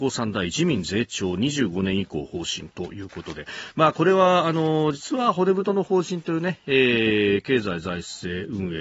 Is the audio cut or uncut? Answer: uncut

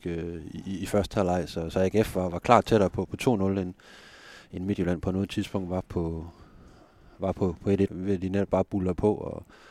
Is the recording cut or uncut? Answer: cut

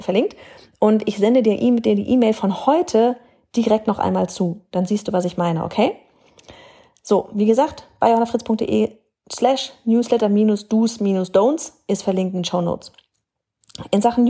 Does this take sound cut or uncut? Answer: uncut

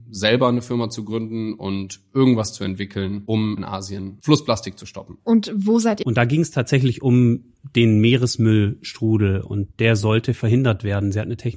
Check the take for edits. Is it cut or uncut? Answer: cut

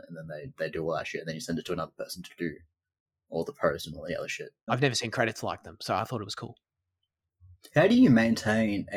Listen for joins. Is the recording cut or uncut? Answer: cut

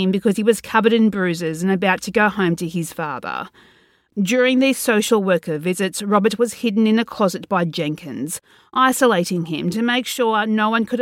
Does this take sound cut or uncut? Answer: cut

